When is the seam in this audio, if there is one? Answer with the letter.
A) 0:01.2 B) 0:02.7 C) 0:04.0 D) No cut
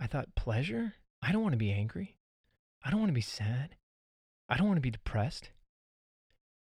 A